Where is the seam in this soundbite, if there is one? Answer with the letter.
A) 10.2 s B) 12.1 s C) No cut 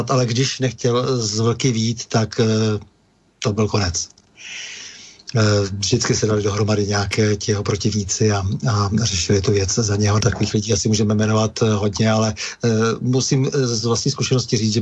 A